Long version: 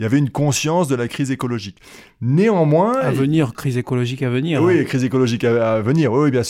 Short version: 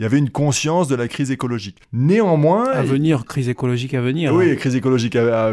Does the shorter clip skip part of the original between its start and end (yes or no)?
yes